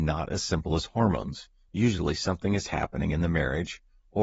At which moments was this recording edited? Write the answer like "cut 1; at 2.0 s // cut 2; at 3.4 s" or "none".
none